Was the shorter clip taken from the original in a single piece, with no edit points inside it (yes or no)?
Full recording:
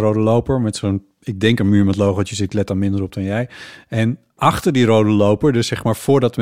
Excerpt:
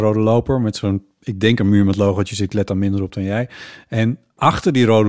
yes